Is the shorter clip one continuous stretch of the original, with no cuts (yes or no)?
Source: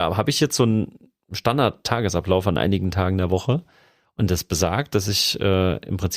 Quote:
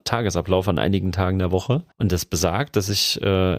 no